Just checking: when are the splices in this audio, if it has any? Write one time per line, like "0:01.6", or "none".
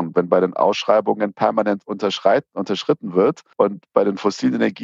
0:03.5